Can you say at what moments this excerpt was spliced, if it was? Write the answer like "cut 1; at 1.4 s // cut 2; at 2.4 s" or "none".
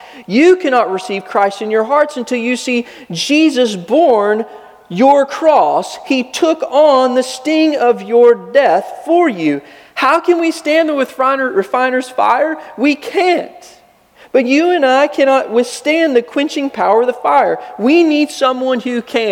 none